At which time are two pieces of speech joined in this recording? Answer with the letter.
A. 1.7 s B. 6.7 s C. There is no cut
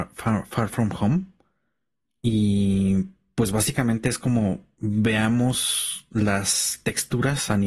C